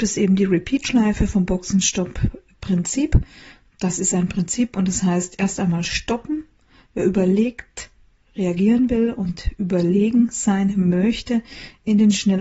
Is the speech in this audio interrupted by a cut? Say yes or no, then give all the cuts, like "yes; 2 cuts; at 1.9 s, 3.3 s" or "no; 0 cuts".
no; 0 cuts